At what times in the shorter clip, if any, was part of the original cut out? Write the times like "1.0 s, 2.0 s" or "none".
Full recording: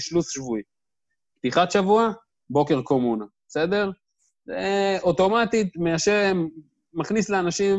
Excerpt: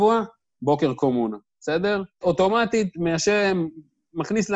2.2 s